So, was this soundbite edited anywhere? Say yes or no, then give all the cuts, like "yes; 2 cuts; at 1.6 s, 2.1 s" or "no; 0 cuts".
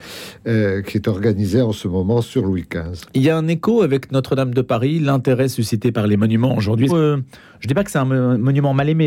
yes; 1 cut; at 6.9 s